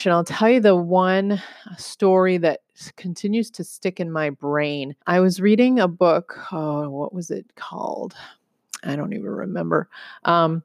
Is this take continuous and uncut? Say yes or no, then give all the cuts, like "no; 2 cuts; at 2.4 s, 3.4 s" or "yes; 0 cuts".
no; 1 cut; at 5.0 s